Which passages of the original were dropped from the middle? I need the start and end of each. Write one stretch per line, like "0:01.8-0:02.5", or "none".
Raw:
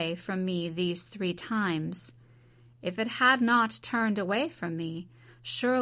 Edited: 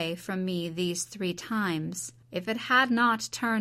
0:02.2-0:02.7